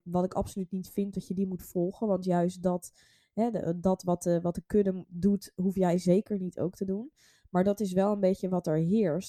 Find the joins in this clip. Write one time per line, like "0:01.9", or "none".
0:05.1

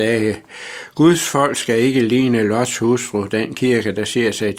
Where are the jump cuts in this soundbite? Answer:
none

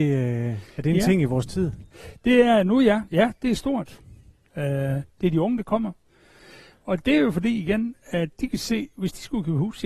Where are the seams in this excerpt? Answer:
0:04.5

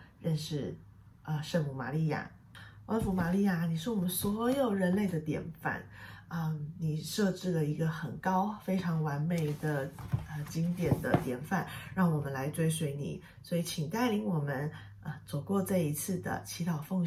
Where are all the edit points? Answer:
none

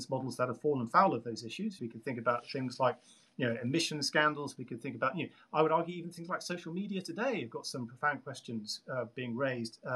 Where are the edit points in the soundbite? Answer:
0:01.8

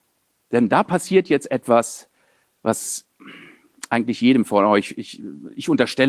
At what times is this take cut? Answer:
none

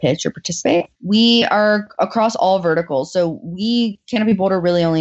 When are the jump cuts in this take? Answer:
0:00.9

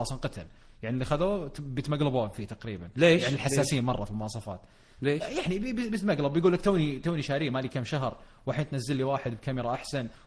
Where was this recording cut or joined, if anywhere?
none

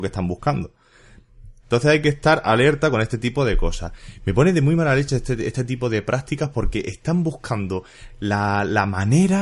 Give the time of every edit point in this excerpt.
0:01.6

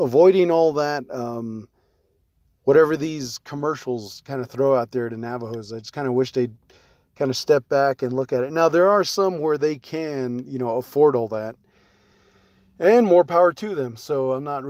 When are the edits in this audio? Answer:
none

